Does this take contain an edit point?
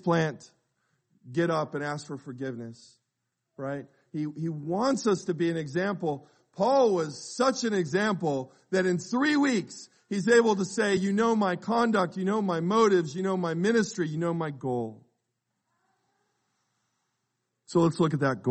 no; 0 cuts

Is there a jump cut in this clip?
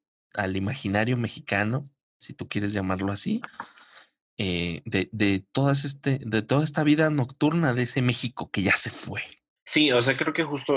yes; 1 cut; at 9.6 s

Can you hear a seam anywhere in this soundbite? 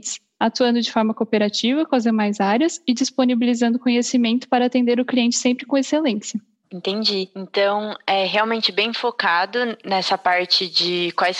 no; 0 cuts

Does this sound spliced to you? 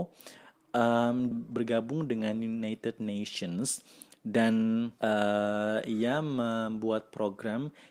yes; 1 cut; at 1.3 s

